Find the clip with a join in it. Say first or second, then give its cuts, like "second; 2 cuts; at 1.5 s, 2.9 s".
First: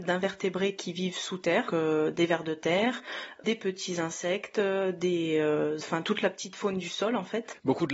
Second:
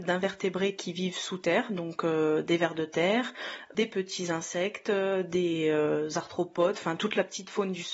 first; 2 cuts; at 1.7 s, 5.8 s